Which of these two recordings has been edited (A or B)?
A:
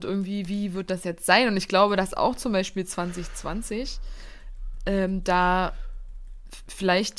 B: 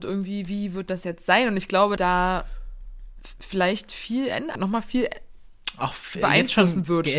B